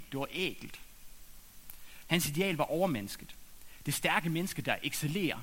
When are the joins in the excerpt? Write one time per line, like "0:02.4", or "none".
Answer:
0:02.0